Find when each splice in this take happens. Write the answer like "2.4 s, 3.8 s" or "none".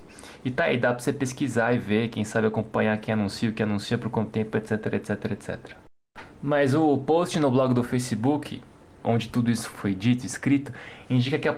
9.7 s